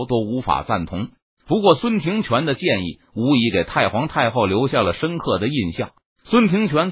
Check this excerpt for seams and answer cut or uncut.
cut